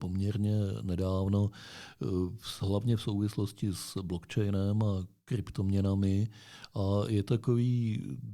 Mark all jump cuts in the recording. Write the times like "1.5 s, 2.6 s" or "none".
none

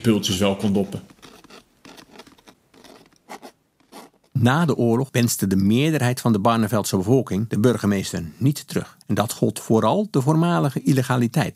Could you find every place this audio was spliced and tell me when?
9.0 s

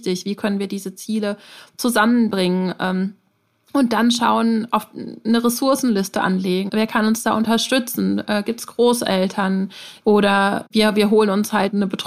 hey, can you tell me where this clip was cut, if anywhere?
6.7 s, 10.0 s

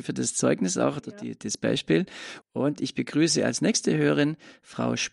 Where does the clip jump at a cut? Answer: 2.4 s

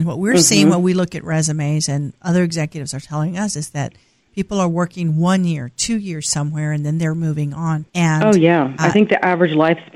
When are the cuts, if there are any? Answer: 7.9 s

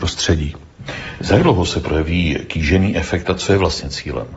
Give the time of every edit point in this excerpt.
none

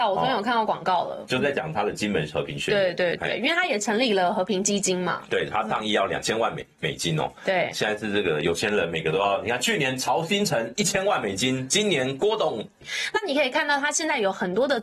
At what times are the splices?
12.8 s

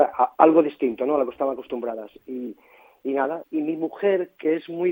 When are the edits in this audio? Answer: 3.4 s

